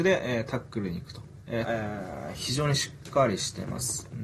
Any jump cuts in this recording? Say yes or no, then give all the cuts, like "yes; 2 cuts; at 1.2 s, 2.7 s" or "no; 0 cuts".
yes; 1 cut; at 1.6 s